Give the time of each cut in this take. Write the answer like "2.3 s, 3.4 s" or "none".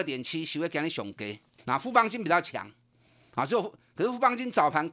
1.6 s